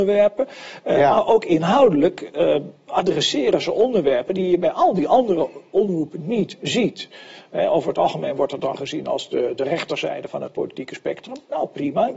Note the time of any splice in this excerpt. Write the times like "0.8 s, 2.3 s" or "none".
none